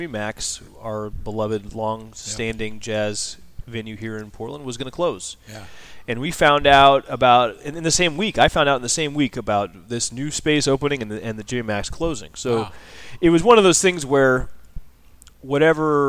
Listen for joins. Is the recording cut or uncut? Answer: uncut